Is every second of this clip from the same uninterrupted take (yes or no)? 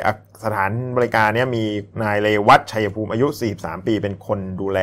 no